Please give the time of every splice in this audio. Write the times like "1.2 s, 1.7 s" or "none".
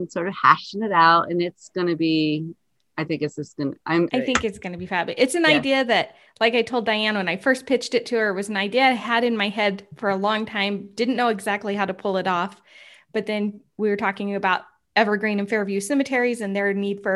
4.1 s

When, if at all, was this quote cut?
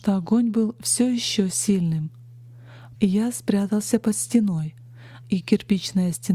2.9 s, 5.2 s

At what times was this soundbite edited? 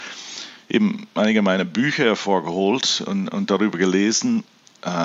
none

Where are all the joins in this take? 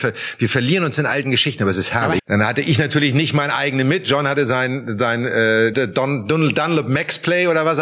2.2 s, 5.7 s

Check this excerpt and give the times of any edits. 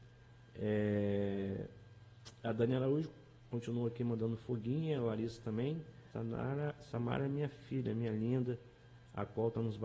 6.1 s

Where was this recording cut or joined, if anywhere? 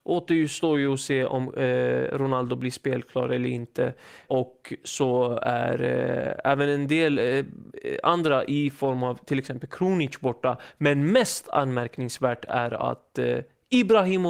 4.3 s

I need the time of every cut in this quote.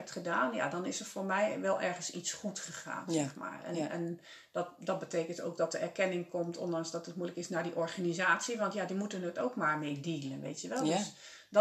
none

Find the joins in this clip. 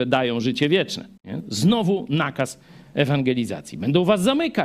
1.2 s

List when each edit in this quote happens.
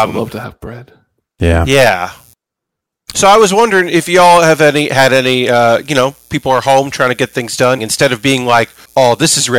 7.8 s

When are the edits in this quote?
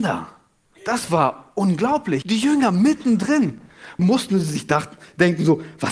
2.2 s, 4.0 s

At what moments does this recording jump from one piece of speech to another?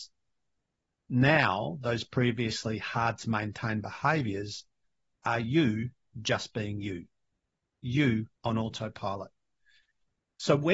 8.4 s

